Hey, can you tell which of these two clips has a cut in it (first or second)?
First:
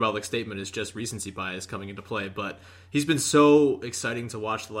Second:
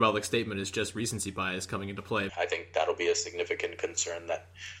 second